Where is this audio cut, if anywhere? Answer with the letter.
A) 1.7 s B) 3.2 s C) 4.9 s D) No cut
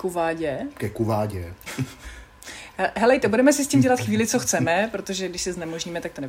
A